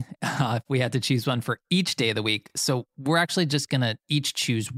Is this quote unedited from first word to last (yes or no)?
yes